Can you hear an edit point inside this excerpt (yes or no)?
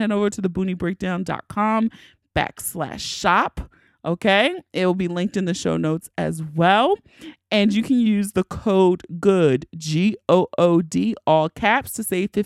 no